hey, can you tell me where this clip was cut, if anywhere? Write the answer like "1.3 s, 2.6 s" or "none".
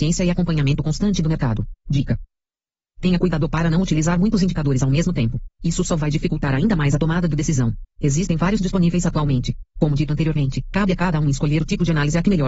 7.9 s